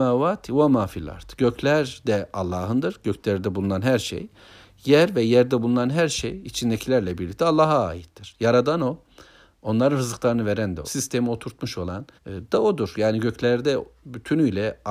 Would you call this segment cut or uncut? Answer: cut